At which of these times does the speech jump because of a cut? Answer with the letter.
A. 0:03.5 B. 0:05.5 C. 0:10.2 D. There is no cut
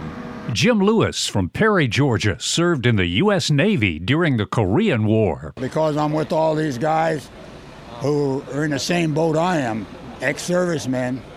C